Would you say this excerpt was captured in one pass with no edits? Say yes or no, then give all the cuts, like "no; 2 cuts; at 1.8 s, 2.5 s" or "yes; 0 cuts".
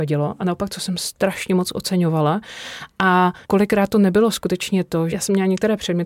no; 2 cuts; at 3.4 s, 5.1 s